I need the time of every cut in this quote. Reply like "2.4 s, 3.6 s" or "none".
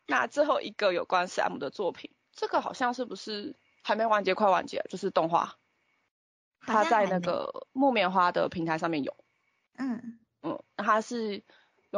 none